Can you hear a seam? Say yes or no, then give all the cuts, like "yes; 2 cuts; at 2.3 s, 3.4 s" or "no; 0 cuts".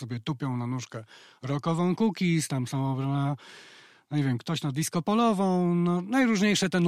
no; 0 cuts